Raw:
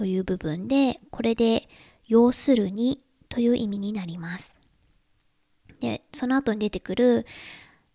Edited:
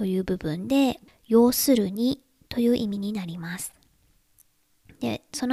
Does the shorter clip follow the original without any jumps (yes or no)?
no